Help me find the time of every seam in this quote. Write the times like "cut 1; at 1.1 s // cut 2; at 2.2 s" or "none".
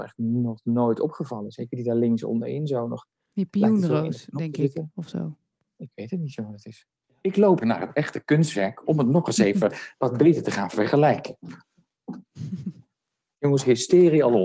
cut 1; at 7.6 s